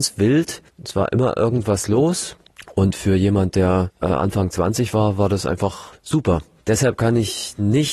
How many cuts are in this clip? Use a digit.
0